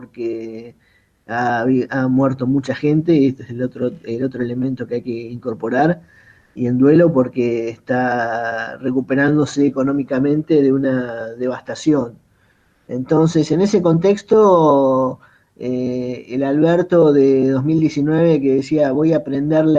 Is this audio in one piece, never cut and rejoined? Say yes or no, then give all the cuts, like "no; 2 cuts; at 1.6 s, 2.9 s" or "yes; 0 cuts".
yes; 0 cuts